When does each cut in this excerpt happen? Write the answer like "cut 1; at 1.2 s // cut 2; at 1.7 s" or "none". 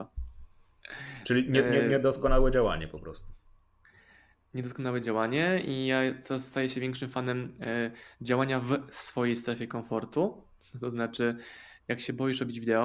none